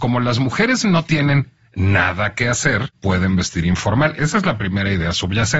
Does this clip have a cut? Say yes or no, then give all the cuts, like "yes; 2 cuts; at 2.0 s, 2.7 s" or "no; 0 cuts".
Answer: yes; 1 cut; at 4.1 s